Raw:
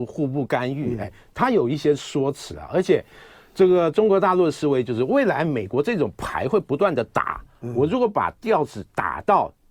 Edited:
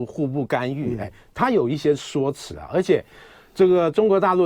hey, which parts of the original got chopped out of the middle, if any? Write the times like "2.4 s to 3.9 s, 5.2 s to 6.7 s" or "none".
none

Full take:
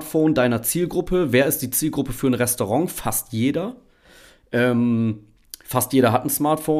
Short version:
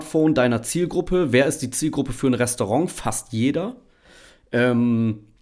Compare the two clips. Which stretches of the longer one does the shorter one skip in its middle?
none

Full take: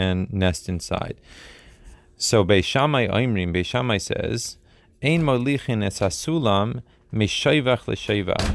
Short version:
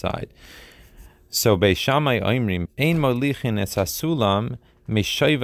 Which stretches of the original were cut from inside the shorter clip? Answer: 3.5 s to 4.9 s

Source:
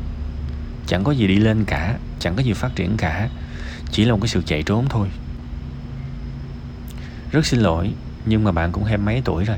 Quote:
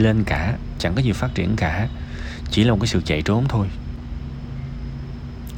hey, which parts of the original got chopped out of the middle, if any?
none

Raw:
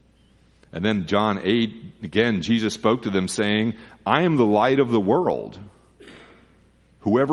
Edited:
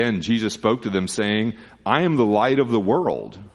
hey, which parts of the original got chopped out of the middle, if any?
none

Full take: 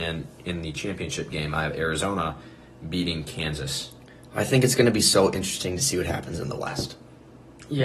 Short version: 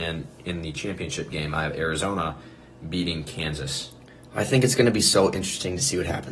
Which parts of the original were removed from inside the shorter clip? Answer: none

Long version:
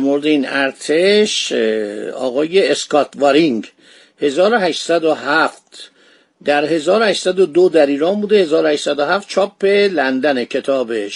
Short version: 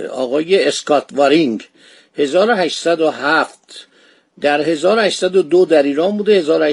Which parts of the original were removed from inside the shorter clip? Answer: none

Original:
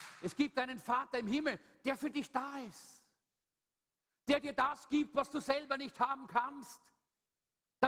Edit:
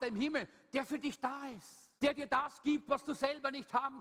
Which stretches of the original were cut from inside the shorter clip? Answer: 3.1 s to 4.2 s

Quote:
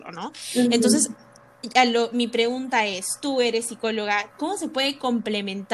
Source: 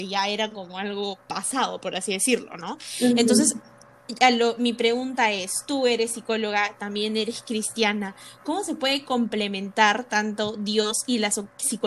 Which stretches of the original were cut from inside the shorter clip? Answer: 6.8 s to 8.4 s

